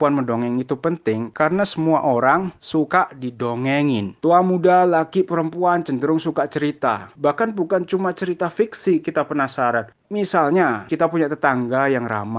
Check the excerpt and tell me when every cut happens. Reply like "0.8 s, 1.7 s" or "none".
7.1 s